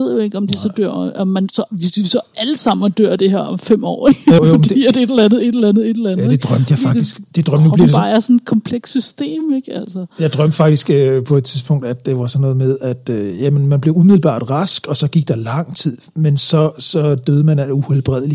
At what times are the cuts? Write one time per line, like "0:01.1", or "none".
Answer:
0:04.4